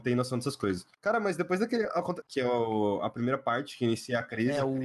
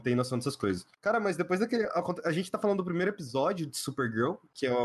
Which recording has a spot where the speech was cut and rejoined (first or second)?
first